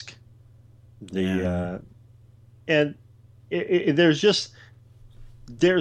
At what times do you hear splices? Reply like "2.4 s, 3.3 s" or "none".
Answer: none